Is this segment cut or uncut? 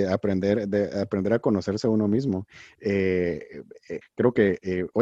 cut